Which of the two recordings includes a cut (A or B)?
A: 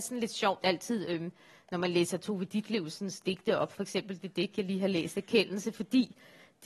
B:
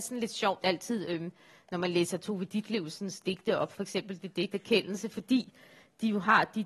B